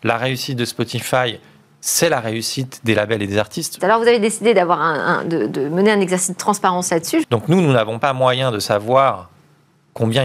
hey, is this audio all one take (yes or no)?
no